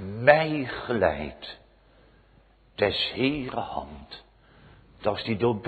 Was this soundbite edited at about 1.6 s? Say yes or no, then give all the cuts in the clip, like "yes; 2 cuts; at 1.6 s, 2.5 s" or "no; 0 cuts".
no; 0 cuts